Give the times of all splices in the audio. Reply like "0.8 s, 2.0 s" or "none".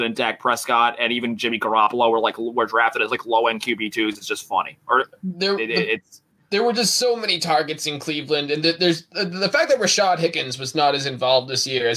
none